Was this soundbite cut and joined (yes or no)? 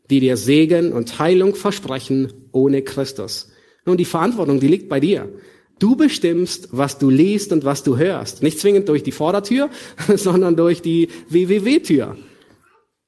yes